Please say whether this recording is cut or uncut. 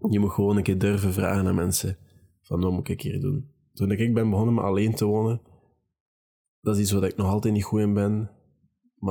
uncut